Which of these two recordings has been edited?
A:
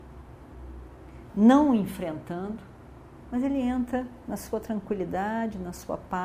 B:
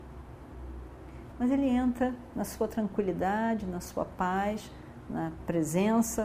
B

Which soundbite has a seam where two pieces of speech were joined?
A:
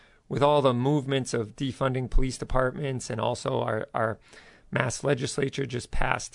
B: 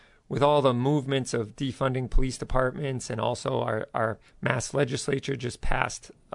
B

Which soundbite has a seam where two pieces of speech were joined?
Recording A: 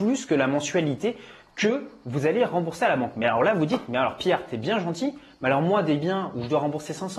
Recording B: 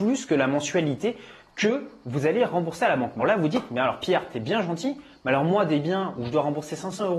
B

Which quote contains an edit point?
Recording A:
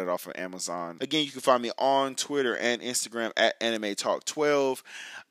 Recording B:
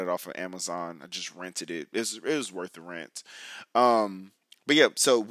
A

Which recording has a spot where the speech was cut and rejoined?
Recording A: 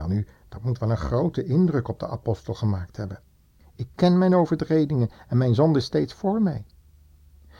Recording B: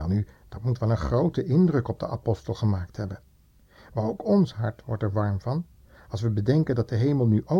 A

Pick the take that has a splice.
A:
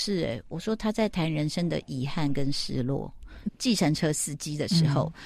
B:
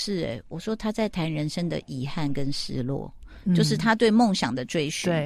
A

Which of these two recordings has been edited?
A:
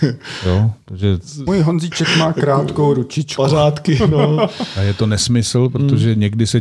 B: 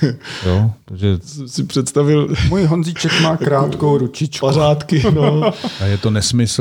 A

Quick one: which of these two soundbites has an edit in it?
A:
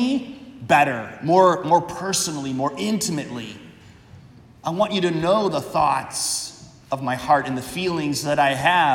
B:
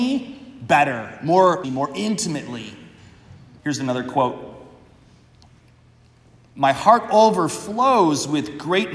B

